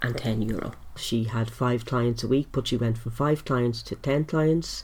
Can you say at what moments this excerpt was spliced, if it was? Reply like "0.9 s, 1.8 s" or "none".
1.0 s